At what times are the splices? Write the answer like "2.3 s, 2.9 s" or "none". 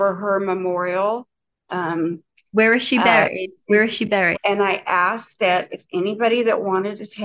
1.6 s, 4.3 s